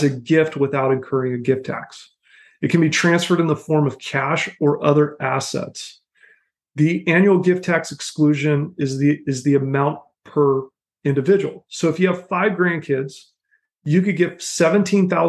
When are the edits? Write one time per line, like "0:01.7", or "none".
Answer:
none